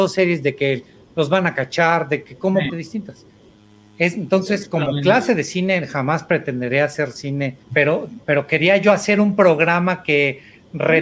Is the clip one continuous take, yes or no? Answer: no